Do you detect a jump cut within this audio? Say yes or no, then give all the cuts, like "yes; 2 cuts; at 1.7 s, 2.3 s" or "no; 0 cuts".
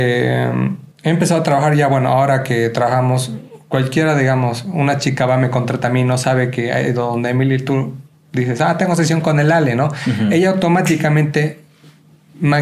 yes; 1 cut; at 0.9 s